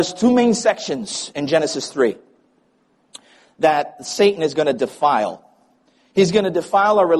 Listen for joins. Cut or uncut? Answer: uncut